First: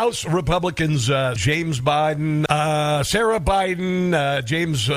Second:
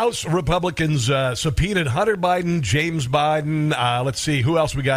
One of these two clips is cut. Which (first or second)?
first